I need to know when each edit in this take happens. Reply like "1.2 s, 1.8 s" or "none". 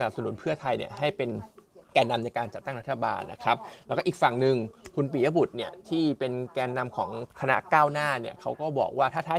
1.8 s